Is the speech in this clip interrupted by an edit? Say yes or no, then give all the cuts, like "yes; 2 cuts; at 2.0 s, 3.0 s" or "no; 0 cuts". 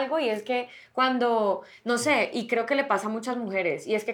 no; 0 cuts